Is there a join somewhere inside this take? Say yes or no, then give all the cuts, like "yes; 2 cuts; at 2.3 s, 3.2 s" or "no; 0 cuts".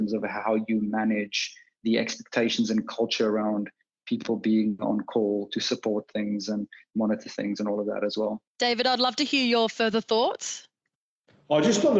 yes; 1 cut; at 8.5 s